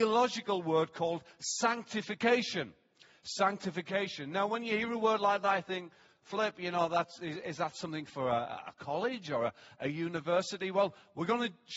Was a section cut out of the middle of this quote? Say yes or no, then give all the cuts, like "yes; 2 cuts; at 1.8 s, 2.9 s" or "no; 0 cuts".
no; 0 cuts